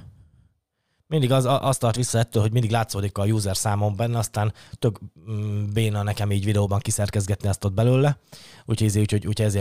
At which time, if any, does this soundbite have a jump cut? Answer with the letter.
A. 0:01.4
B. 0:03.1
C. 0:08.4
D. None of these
B